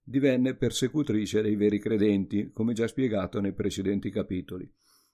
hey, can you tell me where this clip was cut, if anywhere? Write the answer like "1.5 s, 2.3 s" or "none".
none